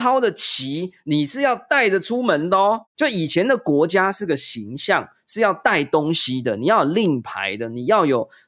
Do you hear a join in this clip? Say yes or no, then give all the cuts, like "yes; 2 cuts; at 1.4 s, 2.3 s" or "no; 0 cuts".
yes; 1 cut; at 2.9 s